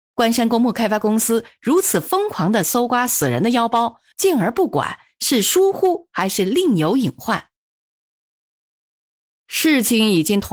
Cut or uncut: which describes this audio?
cut